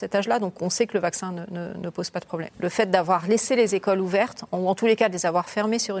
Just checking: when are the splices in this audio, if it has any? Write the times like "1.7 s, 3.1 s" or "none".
2.5 s